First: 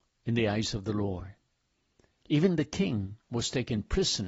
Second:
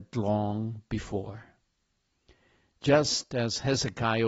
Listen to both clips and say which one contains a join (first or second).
first